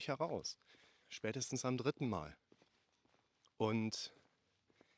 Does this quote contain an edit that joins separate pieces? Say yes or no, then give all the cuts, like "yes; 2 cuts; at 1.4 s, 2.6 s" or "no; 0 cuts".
yes; 1 cut; at 1.0 s